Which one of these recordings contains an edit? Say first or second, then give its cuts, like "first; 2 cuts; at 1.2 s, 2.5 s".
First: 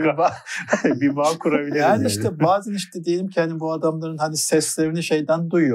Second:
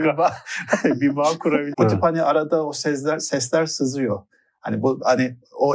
second; 1 cut; at 1.7 s